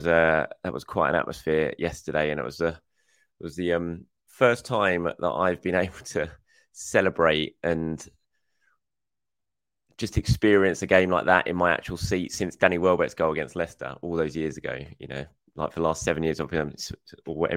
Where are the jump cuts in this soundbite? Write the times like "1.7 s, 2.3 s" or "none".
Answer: none